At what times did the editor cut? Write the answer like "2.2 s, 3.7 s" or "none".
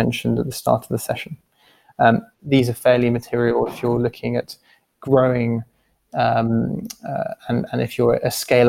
2.4 s